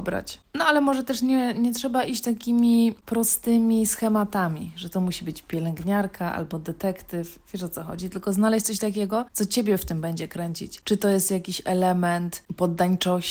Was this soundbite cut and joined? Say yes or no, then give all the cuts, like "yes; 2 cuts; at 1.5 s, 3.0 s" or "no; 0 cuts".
no; 0 cuts